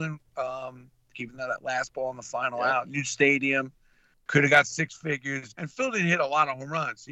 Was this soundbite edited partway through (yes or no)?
yes